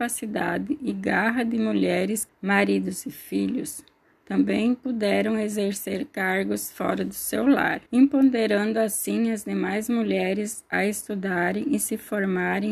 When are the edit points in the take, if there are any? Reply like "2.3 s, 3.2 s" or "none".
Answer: 2.3 s, 7.9 s